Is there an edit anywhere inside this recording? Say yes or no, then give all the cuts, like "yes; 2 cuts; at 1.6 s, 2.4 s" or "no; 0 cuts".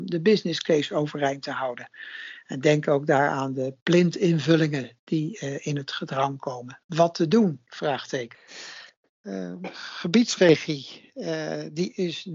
no; 0 cuts